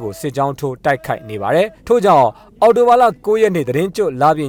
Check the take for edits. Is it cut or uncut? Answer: cut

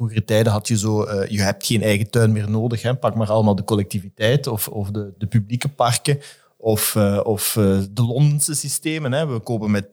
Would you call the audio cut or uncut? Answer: uncut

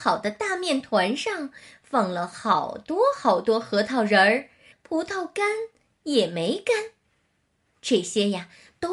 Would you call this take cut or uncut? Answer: cut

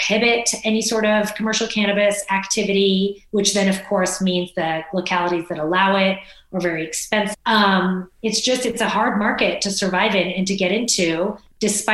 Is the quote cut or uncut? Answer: cut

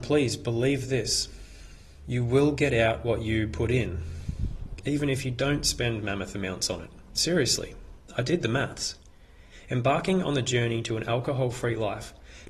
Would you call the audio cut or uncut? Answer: cut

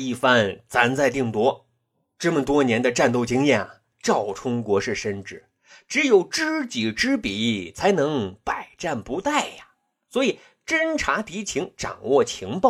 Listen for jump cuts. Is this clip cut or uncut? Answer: uncut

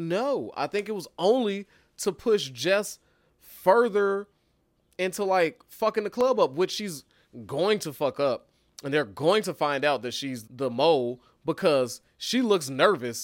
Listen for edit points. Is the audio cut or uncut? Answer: cut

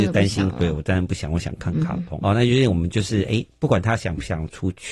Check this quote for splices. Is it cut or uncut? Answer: cut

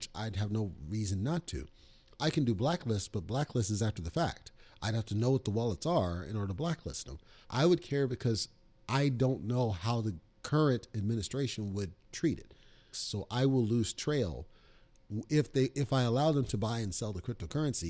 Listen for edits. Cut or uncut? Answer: cut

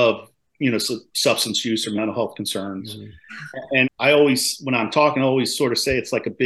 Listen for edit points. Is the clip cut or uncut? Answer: cut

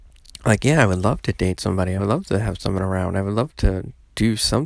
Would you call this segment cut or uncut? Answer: uncut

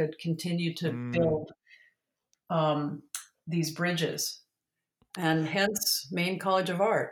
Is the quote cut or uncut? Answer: uncut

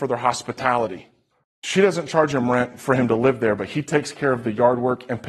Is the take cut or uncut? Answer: cut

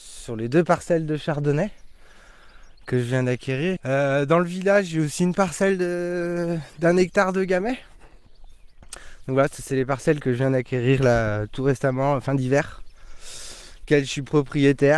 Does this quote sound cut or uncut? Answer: cut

